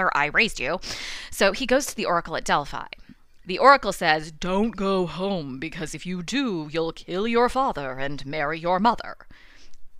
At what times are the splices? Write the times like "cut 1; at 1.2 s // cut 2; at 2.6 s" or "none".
none